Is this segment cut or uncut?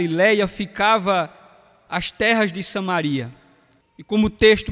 cut